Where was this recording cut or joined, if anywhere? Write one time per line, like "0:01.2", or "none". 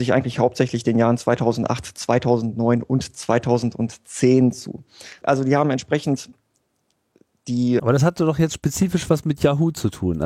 0:05.2
0:07.8